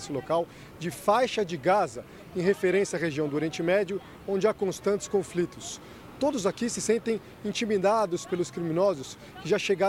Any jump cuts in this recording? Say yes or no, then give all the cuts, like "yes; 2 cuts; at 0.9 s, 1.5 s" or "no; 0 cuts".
no; 0 cuts